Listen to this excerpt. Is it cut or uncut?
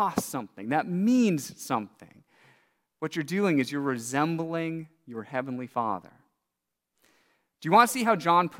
uncut